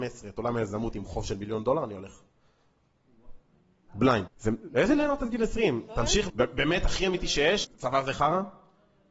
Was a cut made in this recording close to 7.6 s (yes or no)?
yes